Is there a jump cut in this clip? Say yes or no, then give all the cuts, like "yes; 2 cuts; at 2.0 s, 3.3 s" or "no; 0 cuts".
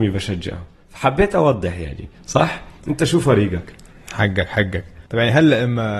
yes; 1 cut; at 5.1 s